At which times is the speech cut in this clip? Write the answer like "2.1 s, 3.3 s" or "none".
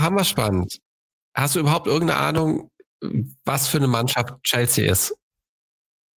none